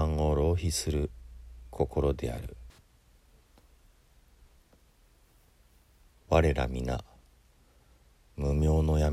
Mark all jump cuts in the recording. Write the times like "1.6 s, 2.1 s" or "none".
none

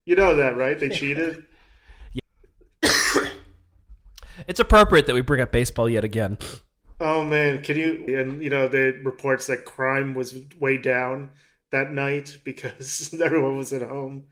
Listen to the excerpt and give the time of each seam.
2.2 s, 8.1 s

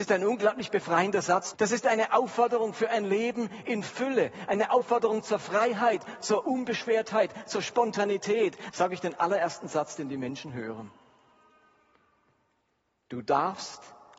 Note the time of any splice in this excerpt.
1.5 s, 8.7 s

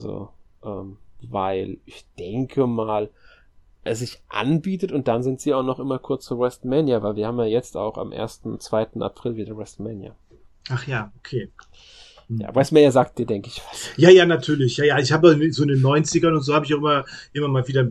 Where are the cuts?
none

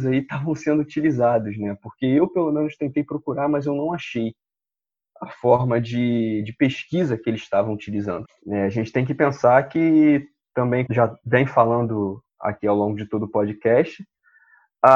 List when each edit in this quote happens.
8.3 s, 10.9 s, 12.3 s

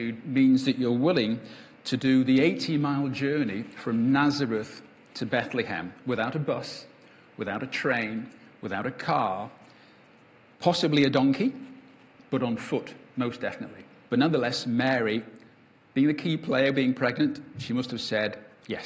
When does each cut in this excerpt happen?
14.1 s

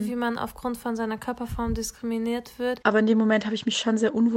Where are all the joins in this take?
2.8 s

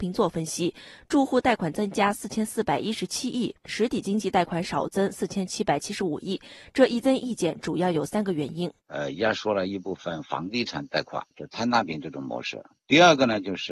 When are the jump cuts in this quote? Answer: 8.8 s, 11.3 s

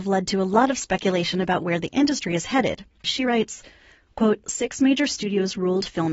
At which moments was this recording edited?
3.0 s, 4.4 s

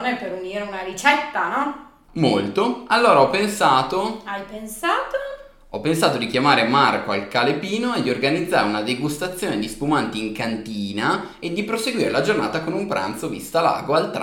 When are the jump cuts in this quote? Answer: 2.1 s

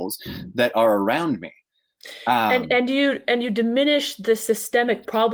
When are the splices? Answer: none

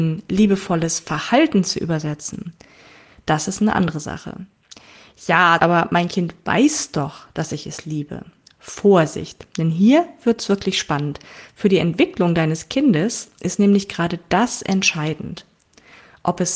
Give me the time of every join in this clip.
5.6 s

